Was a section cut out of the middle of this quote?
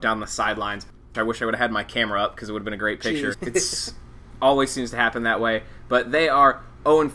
yes; 2 cuts; at 1.1 s, 3.3 s

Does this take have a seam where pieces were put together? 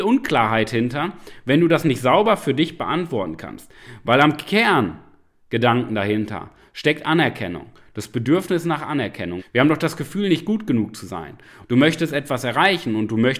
yes; 2 cuts; at 9.4 s, 11.6 s

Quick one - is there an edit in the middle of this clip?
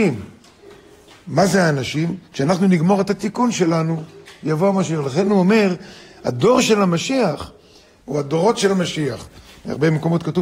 yes; 1 cut; at 8.0 s

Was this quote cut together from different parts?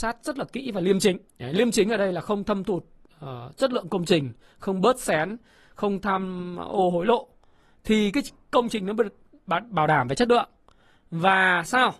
yes; 1 cut; at 1.3 s

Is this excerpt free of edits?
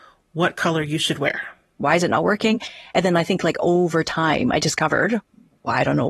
no; 1 cut; at 1.8 s

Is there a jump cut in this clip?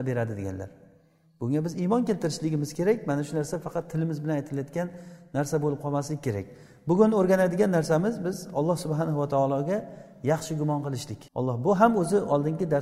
yes; 1 cut; at 11.3 s

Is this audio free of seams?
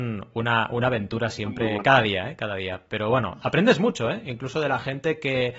yes; 0 cuts

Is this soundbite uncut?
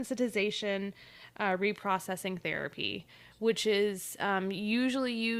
yes; 0 cuts

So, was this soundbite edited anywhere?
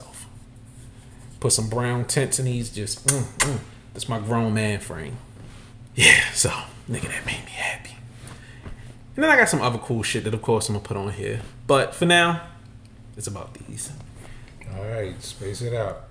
yes; 1 cut; at 5.9 s

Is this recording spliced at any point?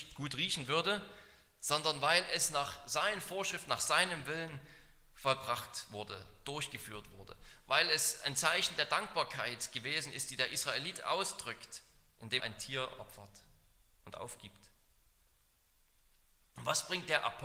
yes; 1 cut; at 12.4 s

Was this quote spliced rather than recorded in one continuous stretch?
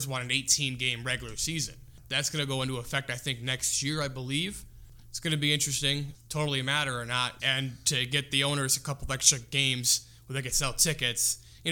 yes; 2 cuts; at 6.2 s, 7.4 s

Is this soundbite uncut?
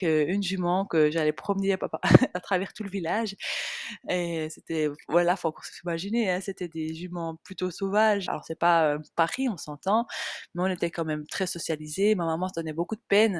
no; 1 cut; at 8.3 s

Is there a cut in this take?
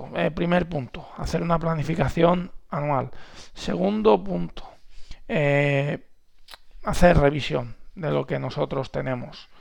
no; 0 cuts

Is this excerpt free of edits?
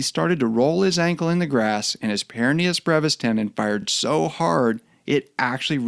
yes; 0 cuts

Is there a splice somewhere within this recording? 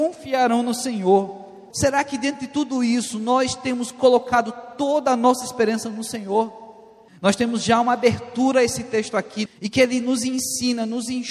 yes; 3 cuts; at 1.7 s, 7.1 s, 9.5 s

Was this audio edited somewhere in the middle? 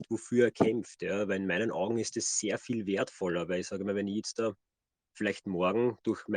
no; 0 cuts

